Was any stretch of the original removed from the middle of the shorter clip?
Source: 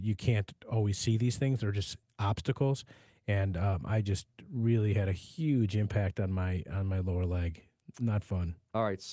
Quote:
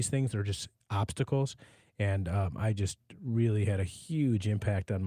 no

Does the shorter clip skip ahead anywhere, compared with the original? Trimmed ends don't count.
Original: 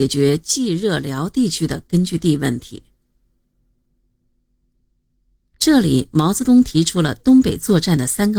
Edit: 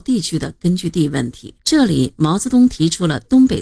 yes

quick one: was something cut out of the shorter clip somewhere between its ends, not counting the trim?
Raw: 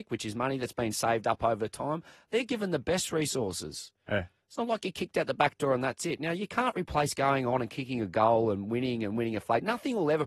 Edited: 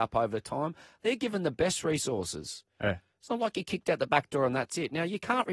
no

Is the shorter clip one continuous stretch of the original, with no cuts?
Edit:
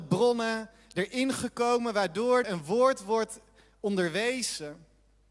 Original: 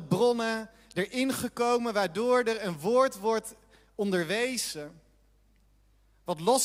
no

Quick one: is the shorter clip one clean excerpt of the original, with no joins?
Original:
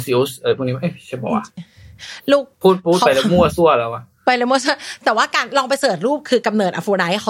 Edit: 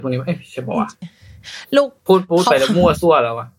yes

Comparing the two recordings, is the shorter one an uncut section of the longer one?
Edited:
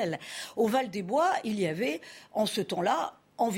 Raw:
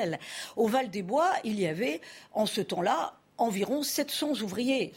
yes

